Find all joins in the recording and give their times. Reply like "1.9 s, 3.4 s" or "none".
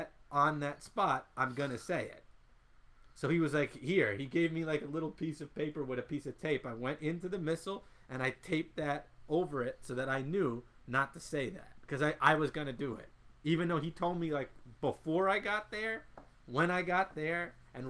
none